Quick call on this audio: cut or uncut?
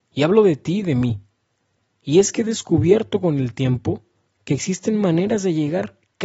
uncut